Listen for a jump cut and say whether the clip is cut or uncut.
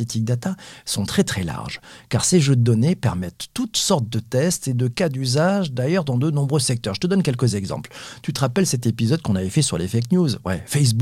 uncut